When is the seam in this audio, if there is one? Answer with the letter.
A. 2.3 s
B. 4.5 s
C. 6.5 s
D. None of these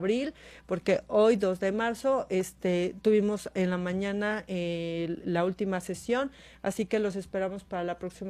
D